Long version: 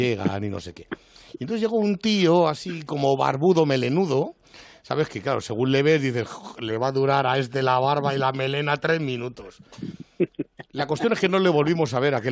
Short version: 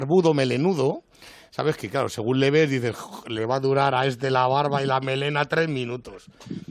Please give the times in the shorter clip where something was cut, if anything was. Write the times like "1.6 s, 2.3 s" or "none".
none